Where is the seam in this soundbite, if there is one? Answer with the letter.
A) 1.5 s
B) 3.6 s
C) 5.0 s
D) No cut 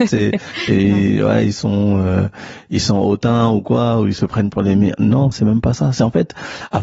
D